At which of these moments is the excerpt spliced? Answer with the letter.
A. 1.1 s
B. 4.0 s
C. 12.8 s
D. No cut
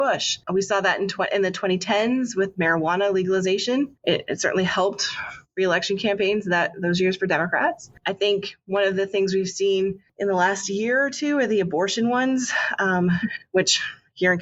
D